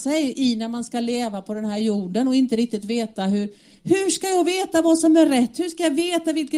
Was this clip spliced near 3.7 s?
no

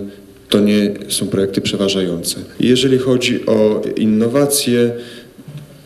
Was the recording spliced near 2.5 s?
yes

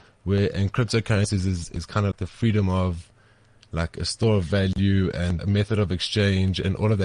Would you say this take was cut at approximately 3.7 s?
no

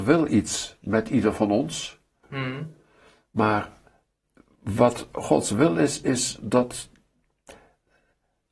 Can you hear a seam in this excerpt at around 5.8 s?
no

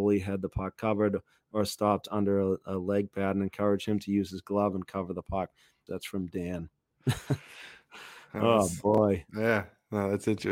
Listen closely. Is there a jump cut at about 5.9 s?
yes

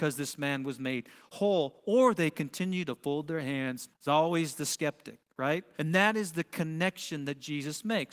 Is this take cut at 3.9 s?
yes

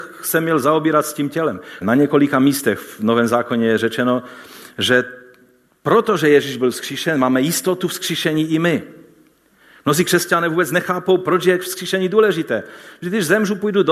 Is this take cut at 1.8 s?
yes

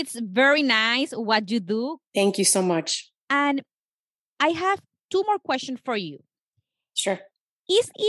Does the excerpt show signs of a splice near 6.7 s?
no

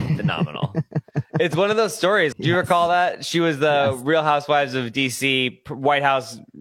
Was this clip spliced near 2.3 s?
yes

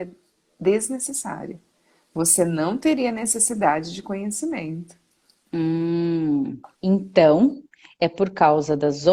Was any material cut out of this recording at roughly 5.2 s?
no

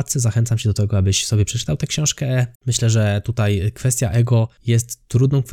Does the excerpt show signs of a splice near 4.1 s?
no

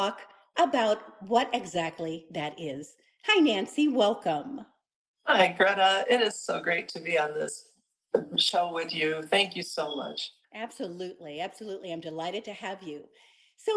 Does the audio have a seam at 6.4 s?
no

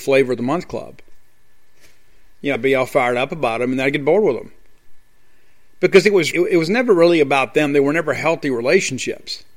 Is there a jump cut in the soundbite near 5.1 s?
no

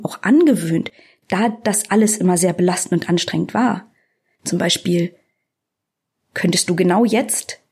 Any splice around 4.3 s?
yes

